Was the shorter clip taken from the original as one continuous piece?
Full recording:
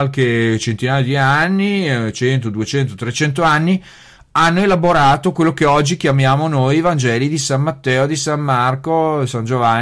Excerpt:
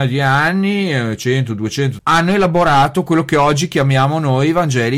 no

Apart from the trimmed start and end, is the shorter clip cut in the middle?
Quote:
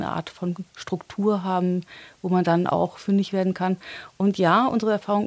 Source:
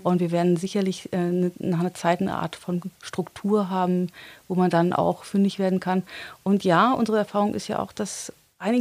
no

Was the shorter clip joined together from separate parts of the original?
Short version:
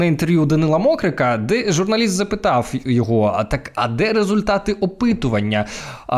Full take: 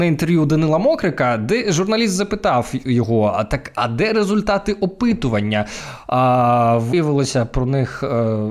no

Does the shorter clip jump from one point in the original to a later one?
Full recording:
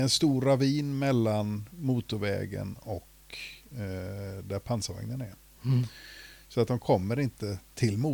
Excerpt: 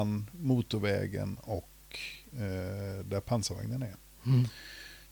no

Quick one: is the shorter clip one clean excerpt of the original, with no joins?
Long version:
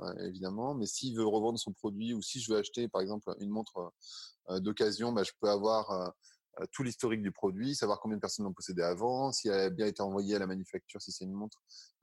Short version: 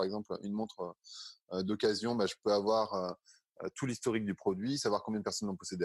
yes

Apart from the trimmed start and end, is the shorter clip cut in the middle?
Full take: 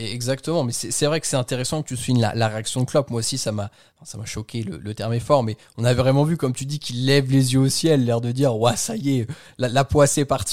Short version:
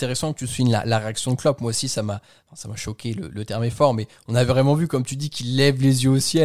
no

